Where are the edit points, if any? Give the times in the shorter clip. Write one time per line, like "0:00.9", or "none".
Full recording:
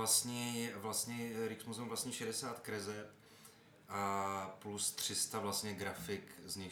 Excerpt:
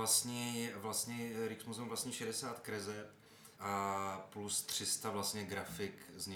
0:03.5

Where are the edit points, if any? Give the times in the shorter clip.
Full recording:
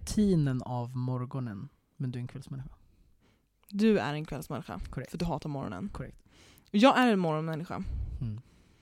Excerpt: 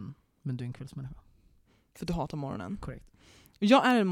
0:01.9

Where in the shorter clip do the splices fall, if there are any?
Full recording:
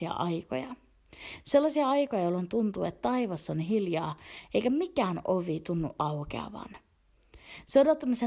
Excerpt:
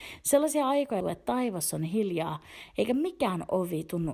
0:01.0

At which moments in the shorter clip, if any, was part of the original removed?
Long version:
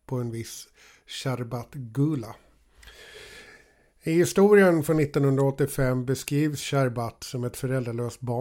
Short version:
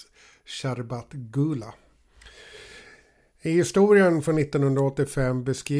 none

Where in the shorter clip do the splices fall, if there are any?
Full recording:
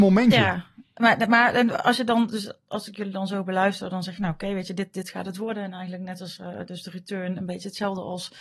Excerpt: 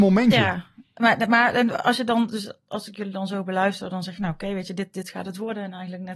none

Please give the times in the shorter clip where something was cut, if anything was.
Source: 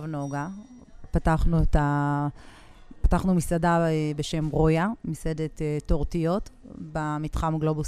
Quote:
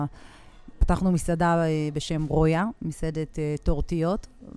none

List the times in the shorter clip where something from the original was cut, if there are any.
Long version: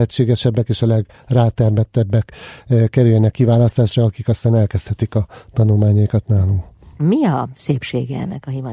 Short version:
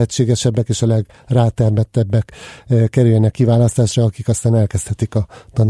none

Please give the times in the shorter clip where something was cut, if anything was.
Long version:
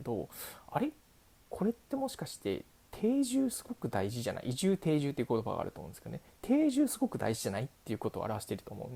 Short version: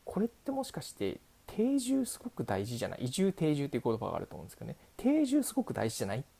none

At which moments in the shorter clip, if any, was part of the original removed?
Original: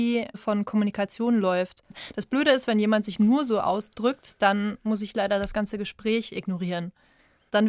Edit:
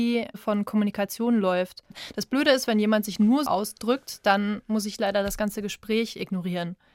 0:03.5

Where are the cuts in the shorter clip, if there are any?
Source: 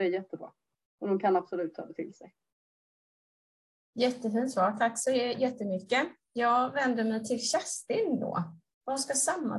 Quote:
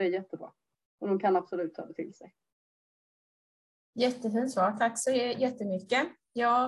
none

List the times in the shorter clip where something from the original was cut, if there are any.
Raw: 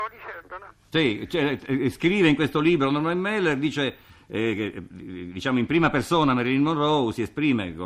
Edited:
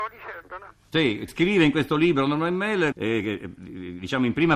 0:01.3
0:02.9

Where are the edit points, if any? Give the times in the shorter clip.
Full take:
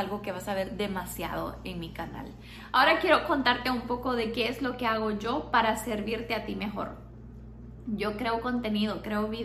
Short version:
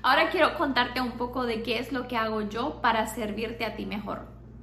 none

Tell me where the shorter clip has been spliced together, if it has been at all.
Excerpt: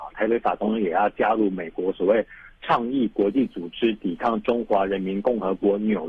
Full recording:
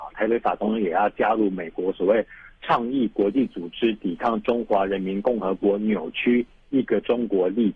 none

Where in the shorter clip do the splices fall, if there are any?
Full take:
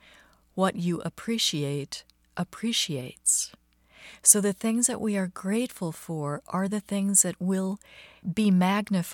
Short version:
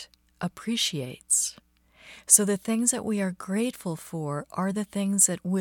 none

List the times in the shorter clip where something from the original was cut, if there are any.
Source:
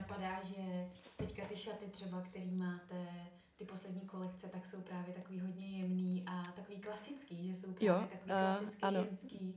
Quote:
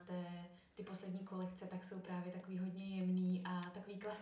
none

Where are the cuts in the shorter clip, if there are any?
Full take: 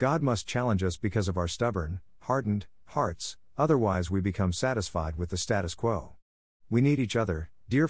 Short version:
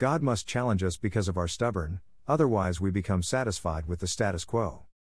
0:02.2

